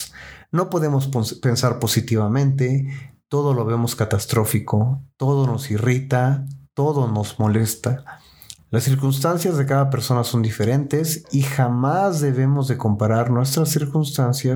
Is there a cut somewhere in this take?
yes; 1 cut; at 8.6 s

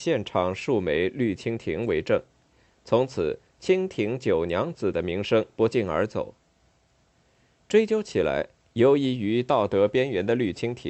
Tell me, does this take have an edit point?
no; 0 cuts

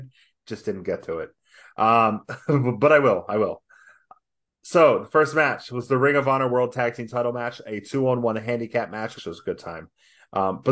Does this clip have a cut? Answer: yes; 1 cut; at 9.2 s

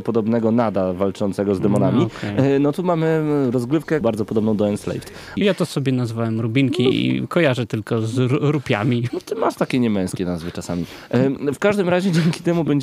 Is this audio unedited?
no; 2 cuts; at 4.0 s, 5.4 s

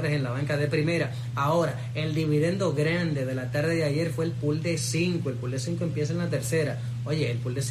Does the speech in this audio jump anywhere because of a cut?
no; 0 cuts

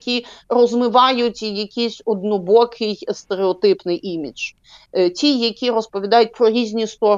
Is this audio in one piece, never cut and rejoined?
yes; 0 cuts

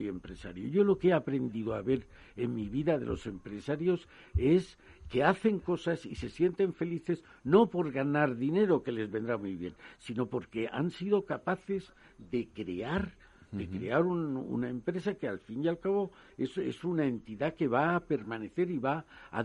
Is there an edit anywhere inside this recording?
no; 0 cuts

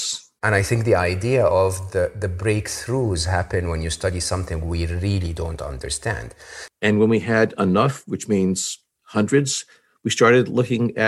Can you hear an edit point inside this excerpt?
yes; 1 cut; at 6.7 s

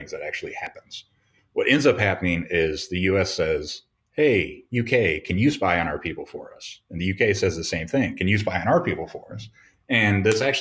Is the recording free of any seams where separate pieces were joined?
yes; 0 cuts

